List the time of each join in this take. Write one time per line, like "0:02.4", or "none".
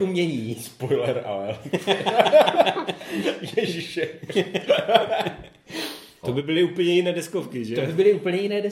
0:06.2